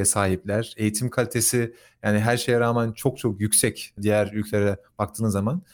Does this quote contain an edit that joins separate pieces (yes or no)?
no